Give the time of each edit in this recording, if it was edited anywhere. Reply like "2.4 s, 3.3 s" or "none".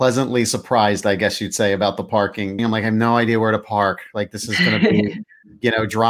2.6 s